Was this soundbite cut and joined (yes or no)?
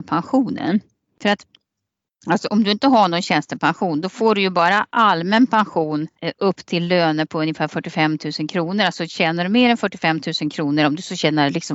no